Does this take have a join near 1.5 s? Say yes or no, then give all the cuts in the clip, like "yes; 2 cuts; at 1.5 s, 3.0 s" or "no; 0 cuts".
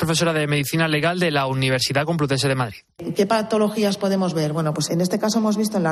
no; 2 cuts; at 3.0 s, 4.9 s